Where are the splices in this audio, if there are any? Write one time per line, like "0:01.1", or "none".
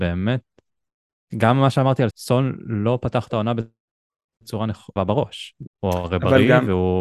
0:02.1
0:05.7